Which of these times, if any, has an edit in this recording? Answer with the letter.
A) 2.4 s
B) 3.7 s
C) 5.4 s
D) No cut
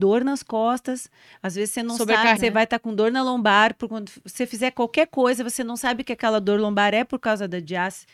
A